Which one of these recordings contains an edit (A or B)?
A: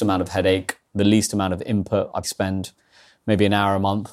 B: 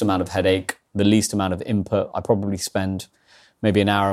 A